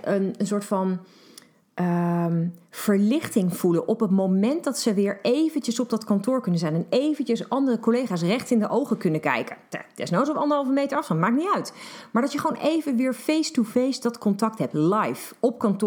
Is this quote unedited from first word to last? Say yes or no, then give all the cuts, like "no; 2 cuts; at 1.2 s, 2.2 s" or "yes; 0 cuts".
yes; 0 cuts